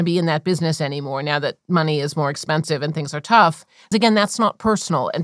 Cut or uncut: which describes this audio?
cut